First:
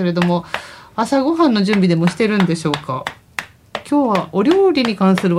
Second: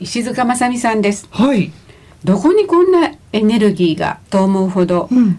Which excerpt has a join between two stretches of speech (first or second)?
second